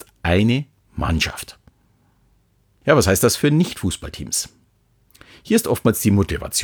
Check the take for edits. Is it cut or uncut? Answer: uncut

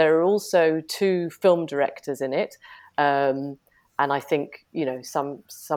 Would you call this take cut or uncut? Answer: cut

